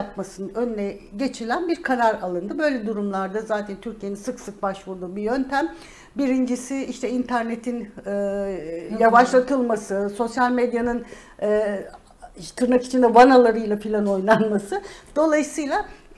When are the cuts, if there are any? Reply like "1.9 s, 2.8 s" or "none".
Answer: none

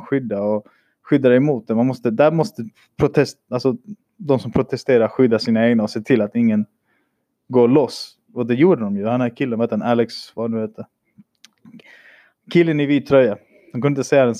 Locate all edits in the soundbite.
none

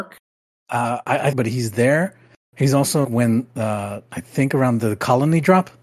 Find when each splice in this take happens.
1.3 s, 3.0 s

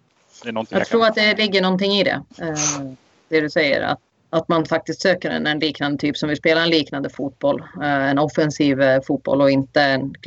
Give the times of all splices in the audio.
2.3 s, 4.1 s

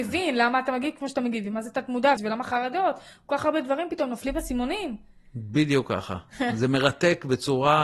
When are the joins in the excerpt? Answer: 2.2 s

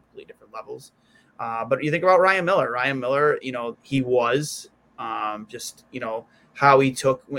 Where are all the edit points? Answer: 3.7 s

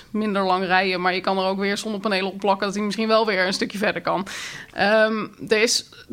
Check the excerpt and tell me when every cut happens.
none

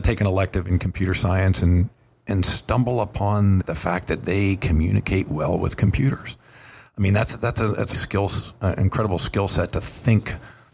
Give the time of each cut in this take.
3.6 s, 7.9 s

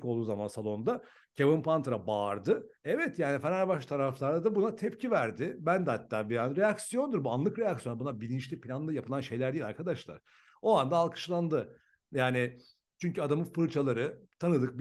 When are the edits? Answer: none

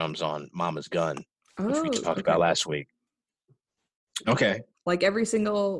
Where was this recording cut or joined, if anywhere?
4.2 s

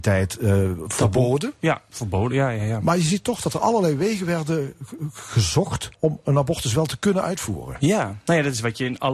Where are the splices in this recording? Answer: 5.9 s

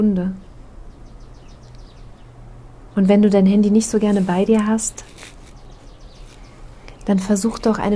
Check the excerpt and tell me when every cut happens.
none

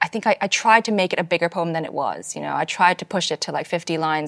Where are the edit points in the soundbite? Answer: none

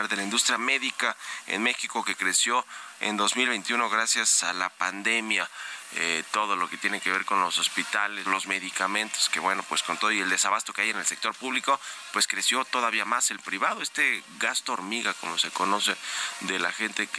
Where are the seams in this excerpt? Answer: 8.3 s

